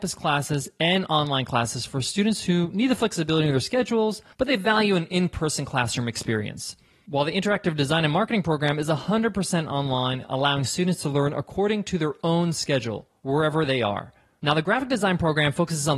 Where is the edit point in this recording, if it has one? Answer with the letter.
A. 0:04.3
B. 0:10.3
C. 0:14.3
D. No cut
A